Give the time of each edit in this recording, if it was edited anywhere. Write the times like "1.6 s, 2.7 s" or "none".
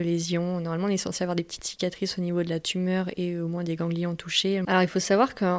4.6 s